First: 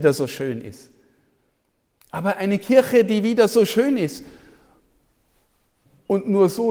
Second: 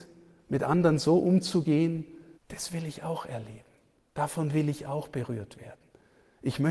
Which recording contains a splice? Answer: second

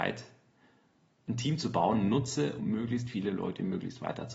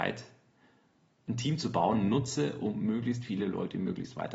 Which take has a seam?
first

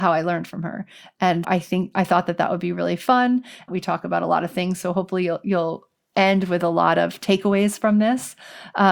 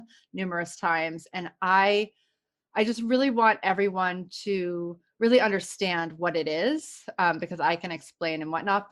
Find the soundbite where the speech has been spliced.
first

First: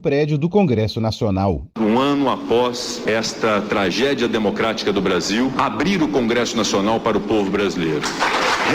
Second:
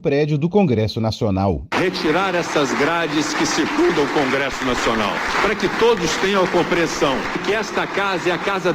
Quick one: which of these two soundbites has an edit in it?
second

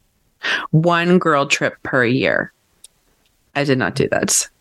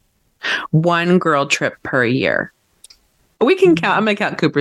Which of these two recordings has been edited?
second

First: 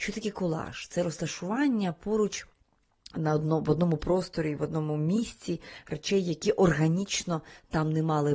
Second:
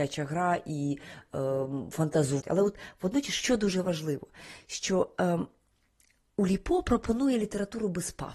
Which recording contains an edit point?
second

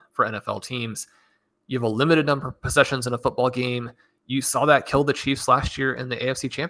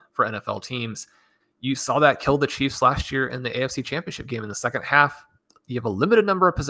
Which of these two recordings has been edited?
second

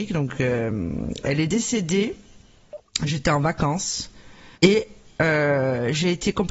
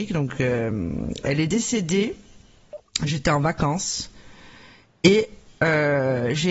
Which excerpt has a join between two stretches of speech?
first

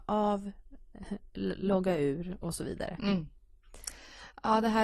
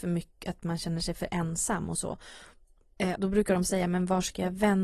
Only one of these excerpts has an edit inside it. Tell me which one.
second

